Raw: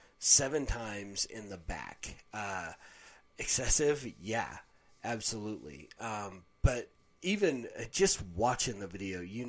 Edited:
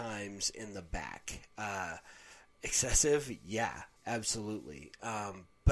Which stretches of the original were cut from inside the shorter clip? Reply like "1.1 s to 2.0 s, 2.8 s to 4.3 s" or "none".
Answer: 4.7 s to 4.9 s